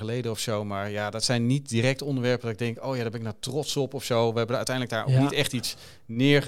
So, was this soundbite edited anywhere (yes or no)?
no